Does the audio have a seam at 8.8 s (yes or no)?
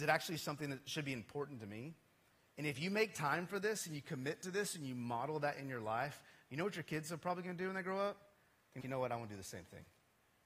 yes